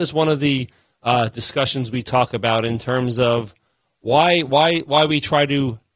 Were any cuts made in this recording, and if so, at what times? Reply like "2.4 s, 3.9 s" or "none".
none